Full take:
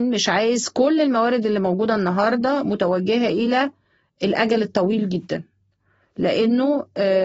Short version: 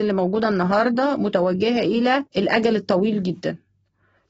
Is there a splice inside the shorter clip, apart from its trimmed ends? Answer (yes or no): yes